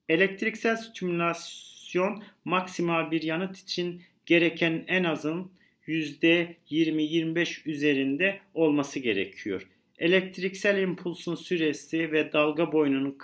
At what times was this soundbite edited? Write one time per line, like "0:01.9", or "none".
none